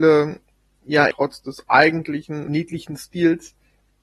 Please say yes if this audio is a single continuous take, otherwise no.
no